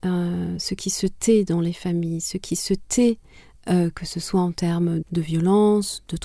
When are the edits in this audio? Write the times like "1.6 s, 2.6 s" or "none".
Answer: 5.0 s